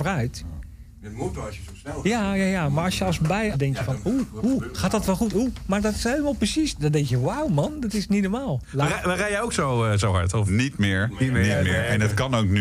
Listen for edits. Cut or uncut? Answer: cut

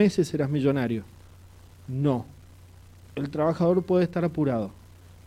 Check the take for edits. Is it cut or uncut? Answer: uncut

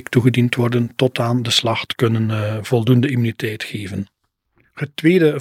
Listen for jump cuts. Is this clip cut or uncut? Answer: uncut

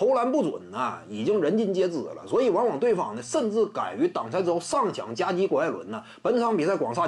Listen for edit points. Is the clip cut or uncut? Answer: uncut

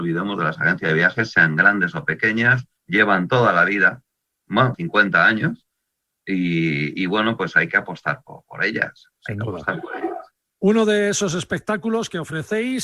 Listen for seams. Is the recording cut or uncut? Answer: cut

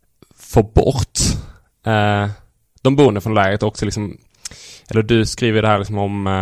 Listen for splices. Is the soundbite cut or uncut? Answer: uncut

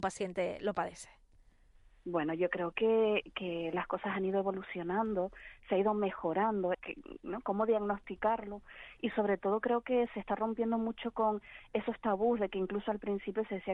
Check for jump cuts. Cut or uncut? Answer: cut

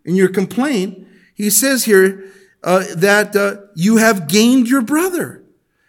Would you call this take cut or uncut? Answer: uncut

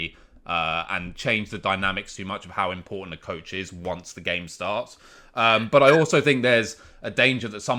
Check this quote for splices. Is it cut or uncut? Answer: uncut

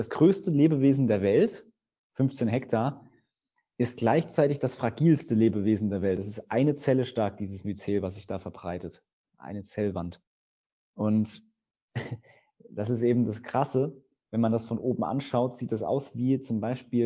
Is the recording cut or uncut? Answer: uncut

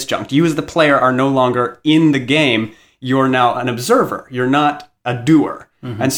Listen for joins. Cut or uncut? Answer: uncut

